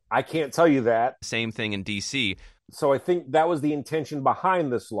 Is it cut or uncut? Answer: cut